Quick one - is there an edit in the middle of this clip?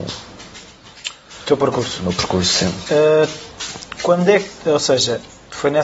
no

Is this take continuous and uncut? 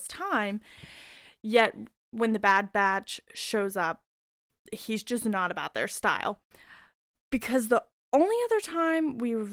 no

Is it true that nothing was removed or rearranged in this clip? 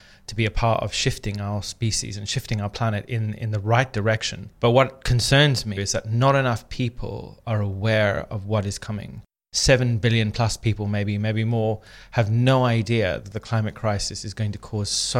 no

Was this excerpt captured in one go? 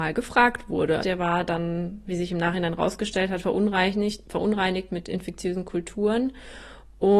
no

